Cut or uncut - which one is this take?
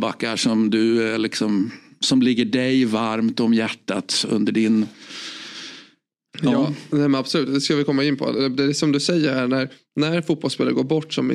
uncut